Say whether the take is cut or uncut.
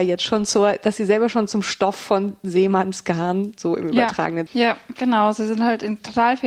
cut